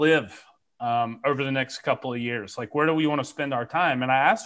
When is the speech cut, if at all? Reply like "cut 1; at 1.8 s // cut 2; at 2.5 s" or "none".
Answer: none